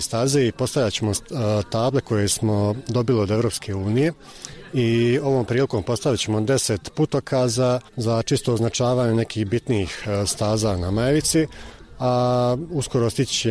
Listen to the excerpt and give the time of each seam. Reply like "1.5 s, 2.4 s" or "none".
7.9 s

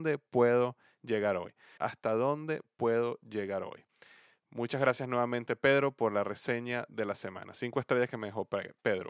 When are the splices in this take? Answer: 1.8 s

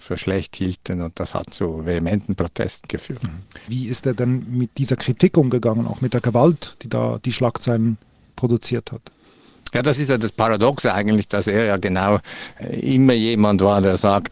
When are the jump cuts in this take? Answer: 3.7 s

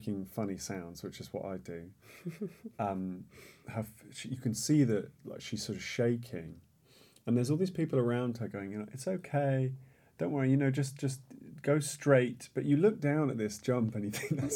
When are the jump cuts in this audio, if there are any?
none

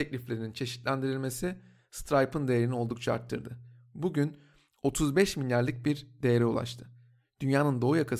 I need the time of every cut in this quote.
none

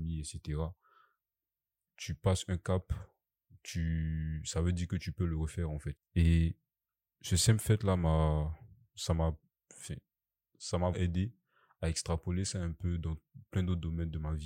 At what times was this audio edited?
6.0 s, 10.9 s

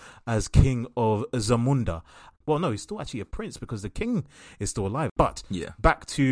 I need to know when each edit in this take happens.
2.3 s, 5.1 s

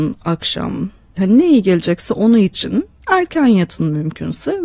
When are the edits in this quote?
1.2 s

